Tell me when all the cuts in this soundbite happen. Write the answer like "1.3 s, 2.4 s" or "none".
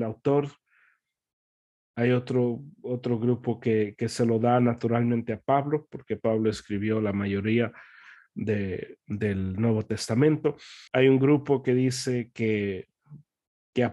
10.9 s